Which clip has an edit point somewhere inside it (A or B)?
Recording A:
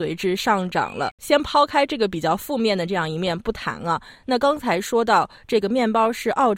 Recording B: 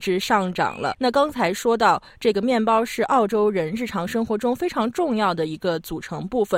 B